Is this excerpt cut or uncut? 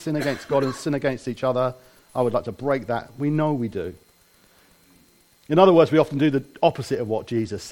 uncut